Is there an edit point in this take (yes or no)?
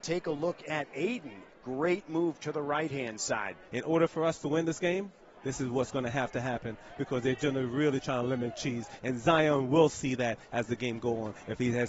yes